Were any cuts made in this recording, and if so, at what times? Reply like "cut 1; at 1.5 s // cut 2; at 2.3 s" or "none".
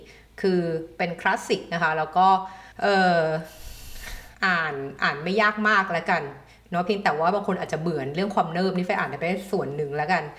cut 1; at 2.7 s // cut 2; at 4.3 s